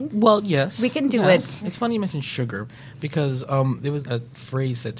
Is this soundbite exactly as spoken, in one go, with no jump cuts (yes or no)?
no